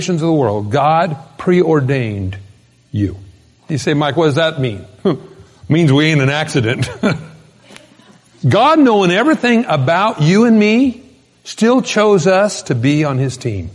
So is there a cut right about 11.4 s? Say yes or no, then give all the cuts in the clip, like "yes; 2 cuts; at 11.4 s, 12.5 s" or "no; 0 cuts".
no; 1 cut; at 3.6 s